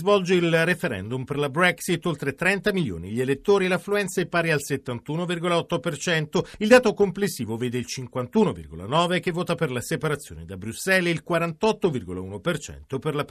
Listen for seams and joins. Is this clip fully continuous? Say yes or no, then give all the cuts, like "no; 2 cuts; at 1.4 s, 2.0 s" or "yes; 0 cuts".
yes; 0 cuts